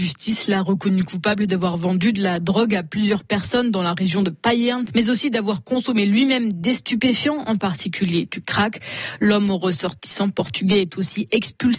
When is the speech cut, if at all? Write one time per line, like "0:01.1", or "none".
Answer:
0:04.9